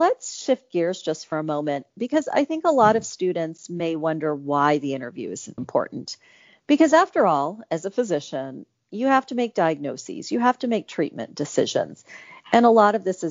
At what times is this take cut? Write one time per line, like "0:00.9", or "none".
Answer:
0:05.6